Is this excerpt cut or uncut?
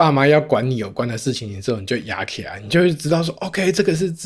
uncut